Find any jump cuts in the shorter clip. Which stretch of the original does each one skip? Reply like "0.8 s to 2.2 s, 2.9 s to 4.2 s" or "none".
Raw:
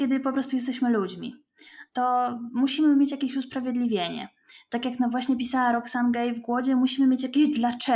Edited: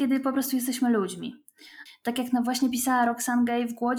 1.9 s to 4.5 s